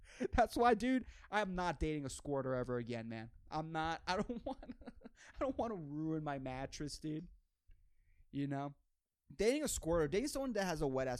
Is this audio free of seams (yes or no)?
yes